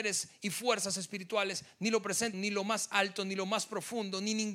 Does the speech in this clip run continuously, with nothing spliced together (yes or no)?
no